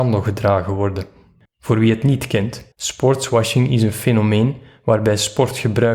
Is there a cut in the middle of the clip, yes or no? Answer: yes